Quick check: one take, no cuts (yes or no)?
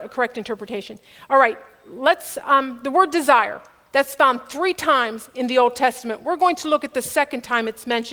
yes